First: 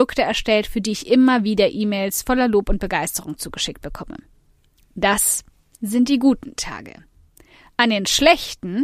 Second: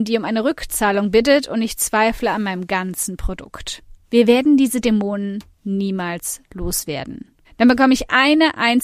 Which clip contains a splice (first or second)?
second